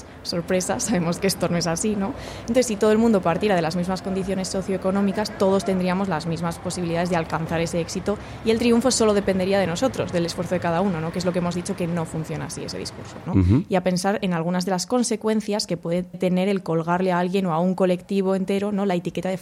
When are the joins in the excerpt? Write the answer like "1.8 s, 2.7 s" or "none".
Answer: 13.3 s, 16.1 s